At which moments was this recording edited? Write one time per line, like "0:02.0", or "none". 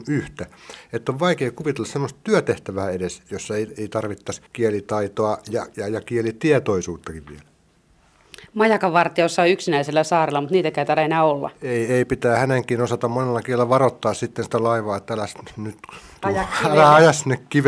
0:04.5